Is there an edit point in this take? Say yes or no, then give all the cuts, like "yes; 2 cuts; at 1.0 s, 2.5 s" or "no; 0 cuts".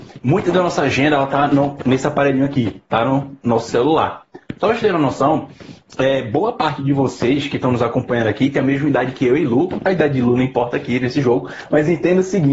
no; 0 cuts